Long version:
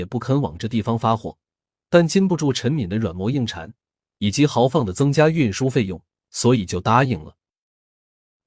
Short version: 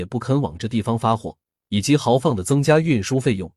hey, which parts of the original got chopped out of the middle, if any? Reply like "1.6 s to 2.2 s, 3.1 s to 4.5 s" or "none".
1.6 s to 4.1 s